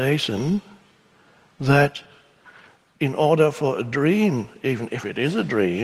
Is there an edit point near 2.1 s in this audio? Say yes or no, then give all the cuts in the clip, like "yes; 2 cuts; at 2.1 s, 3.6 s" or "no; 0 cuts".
no; 0 cuts